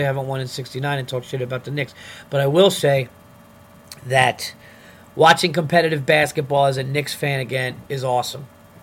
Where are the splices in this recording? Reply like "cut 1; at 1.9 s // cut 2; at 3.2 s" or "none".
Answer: none